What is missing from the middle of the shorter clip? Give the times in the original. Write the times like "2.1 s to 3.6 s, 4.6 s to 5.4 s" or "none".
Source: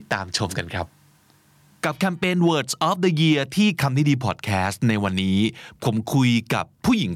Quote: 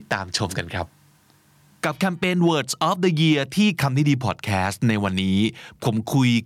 none